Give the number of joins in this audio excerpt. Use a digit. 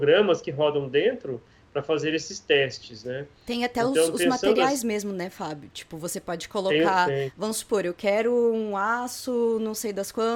0